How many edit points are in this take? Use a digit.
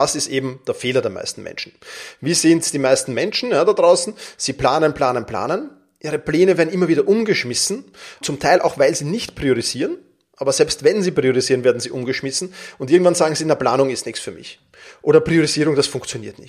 1